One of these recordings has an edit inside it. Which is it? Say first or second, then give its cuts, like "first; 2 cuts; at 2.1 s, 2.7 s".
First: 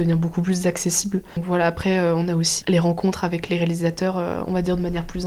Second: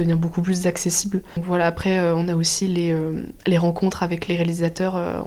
first; 1 cut; at 2.6 s